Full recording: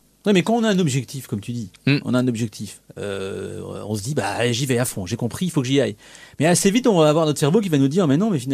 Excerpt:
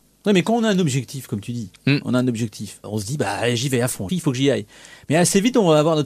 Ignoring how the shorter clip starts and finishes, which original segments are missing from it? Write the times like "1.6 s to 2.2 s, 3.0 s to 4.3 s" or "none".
2.8 s to 3.8 s, 5.1 s to 5.4 s